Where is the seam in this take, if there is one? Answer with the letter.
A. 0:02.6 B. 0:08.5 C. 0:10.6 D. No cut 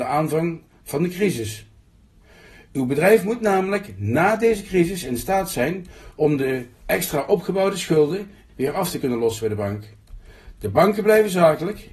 B